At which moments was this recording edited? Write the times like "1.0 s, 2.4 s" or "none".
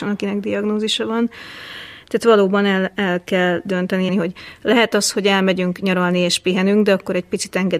4.1 s